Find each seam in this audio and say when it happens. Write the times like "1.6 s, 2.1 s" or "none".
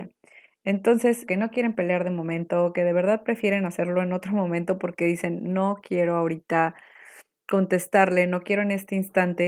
1.3 s